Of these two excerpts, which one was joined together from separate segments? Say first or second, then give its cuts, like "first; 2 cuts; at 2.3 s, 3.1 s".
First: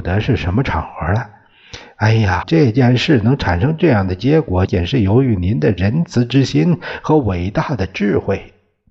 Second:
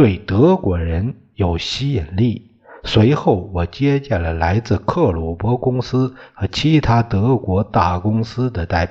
first; 2 cuts; at 2.4 s, 4.7 s